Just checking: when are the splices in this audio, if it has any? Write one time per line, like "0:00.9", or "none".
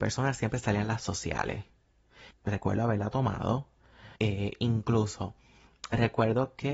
0:02.3
0:04.2